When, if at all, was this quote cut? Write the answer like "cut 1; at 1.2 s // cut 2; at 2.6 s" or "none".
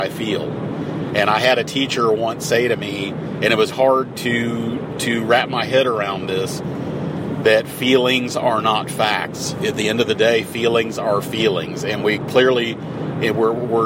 cut 1; at 3.7 s